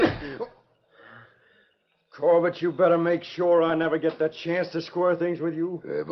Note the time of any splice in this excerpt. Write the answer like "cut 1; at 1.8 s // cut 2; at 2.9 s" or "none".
none